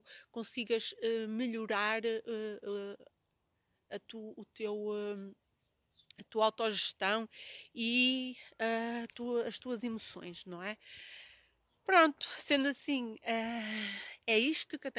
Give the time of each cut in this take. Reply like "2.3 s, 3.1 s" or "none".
none